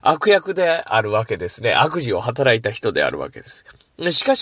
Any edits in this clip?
no; 0 cuts

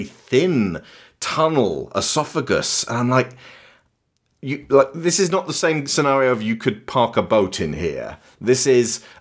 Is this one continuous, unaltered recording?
yes; 0 cuts

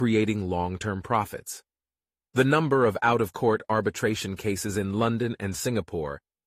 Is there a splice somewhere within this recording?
yes; 1 cut; at 2.3 s

